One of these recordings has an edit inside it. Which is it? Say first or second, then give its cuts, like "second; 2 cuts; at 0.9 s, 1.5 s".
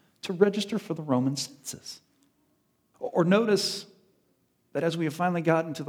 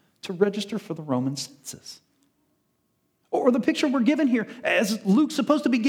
first; 1 cut; at 2.9 s